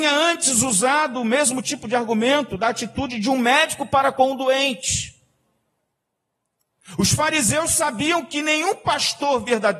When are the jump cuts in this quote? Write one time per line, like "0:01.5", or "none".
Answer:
none